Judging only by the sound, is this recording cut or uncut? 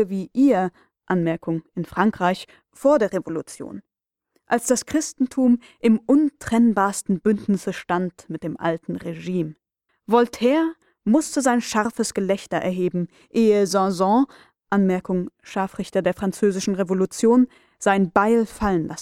cut